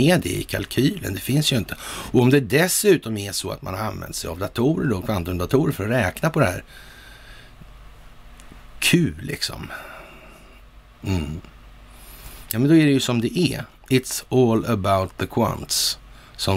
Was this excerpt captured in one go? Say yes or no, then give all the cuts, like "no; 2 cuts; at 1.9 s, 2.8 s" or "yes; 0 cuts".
no; 1 cut; at 10.9 s